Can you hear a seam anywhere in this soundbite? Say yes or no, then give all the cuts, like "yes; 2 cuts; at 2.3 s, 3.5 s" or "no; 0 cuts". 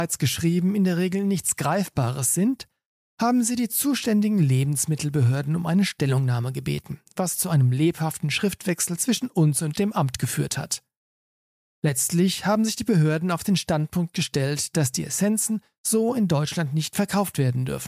no; 0 cuts